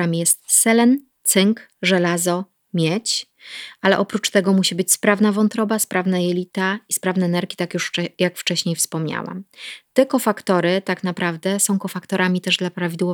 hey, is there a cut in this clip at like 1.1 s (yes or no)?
no